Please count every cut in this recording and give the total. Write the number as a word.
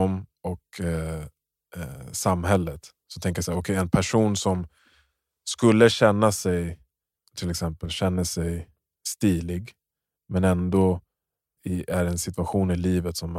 two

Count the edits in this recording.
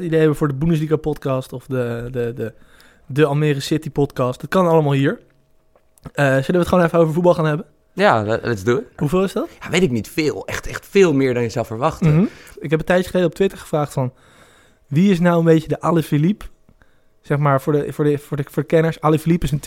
two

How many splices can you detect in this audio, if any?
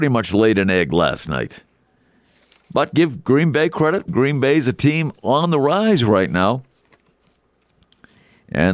zero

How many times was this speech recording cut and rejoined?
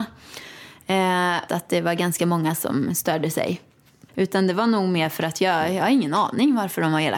two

